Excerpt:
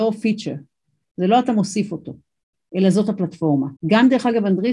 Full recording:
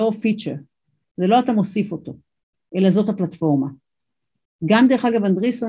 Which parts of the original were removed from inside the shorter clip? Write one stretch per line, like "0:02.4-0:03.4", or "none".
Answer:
0:03.8-0:04.6